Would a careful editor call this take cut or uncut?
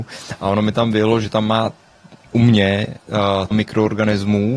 cut